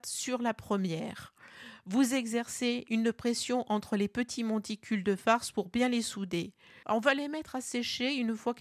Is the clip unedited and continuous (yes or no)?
no